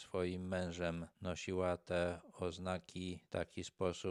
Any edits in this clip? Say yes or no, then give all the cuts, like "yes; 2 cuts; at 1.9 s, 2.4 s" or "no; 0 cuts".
no; 0 cuts